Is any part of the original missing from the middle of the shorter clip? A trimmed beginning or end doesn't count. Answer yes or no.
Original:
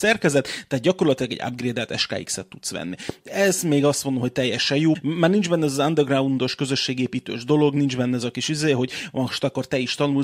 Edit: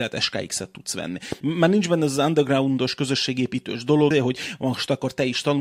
yes